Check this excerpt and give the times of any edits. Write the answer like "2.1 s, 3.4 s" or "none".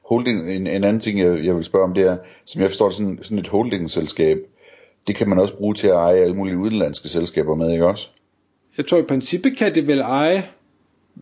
8.6 s